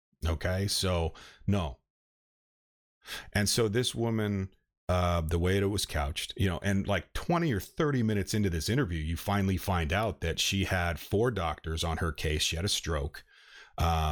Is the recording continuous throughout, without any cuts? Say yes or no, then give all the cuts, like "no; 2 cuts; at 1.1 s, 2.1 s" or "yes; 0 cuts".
yes; 0 cuts